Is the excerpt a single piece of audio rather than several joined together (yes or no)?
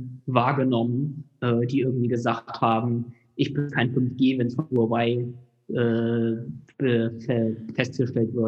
yes